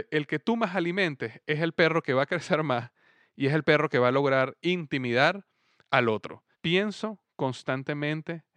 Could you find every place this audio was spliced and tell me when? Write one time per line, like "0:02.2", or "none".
0:06.5